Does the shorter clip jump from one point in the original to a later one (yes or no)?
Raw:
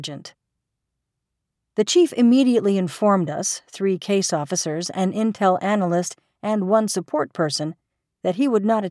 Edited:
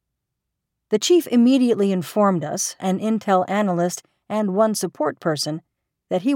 yes